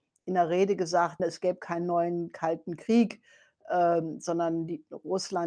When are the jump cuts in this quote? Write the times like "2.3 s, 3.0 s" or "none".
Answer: 1.2 s